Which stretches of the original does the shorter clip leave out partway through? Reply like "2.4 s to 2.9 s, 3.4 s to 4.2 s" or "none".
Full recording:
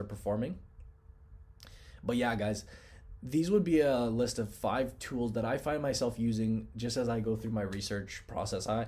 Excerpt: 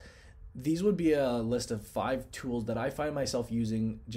none